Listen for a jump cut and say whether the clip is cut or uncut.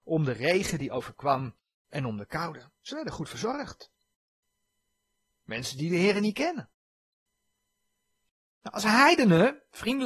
uncut